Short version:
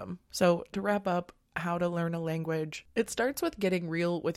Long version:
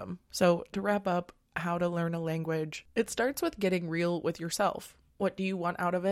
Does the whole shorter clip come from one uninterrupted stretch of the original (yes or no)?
yes